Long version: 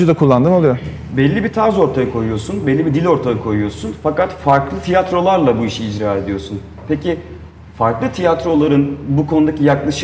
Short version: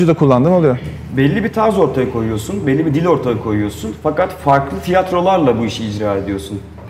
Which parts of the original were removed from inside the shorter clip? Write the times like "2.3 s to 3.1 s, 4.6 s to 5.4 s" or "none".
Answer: none